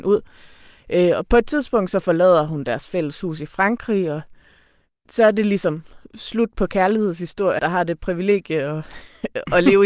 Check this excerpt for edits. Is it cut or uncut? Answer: cut